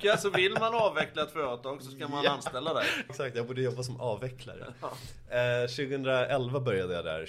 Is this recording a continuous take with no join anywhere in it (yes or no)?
no